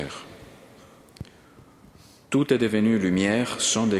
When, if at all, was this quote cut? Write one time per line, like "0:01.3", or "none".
none

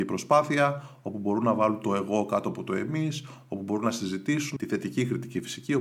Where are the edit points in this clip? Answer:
0:04.6

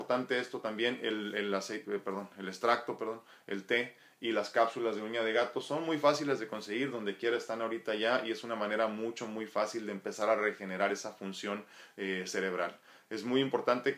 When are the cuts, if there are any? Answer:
none

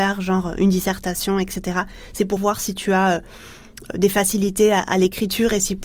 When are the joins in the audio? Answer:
0:02.4

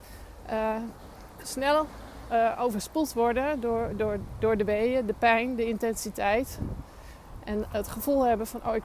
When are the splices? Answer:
none

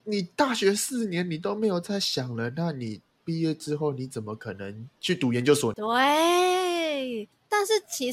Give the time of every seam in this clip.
0:05.7

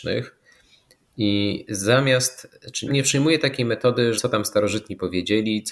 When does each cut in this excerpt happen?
0:02.9
0:04.2

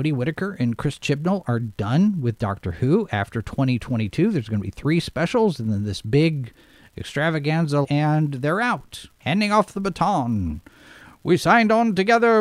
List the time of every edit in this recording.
0:07.8
0:09.1

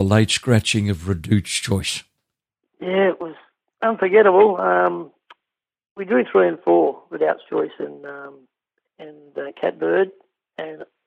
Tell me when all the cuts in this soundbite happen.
none

